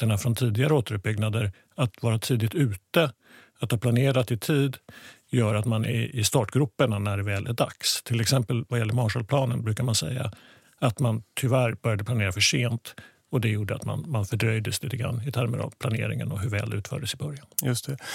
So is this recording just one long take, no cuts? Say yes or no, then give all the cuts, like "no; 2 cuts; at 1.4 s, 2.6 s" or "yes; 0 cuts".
yes; 0 cuts